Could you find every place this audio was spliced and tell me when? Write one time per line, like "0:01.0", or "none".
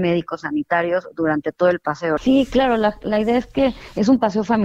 0:02.2